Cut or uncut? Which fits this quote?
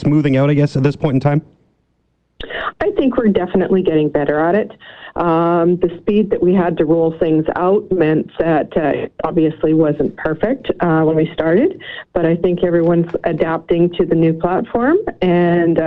uncut